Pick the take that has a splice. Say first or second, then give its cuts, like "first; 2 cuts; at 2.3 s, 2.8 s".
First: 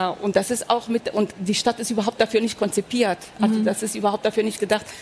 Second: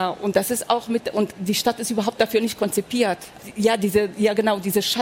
second; 1 cut; at 3.4 s